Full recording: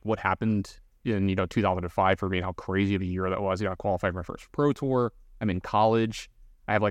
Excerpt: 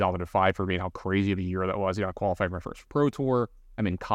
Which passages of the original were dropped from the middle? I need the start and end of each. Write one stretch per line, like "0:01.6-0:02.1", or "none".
none